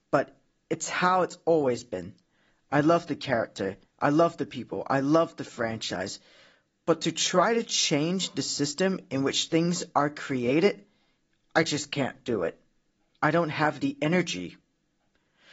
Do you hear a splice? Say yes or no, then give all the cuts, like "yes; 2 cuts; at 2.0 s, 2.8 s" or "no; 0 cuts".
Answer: no; 0 cuts